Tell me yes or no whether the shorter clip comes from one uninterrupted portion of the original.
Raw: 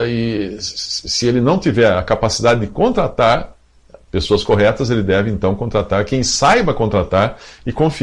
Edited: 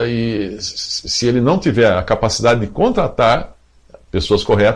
yes